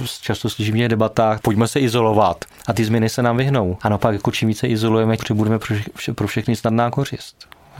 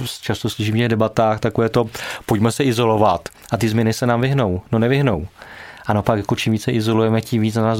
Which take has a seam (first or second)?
first